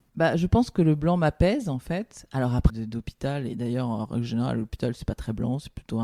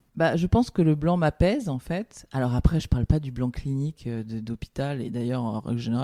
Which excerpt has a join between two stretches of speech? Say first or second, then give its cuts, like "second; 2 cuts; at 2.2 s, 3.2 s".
first; 1 cut; at 2.7 s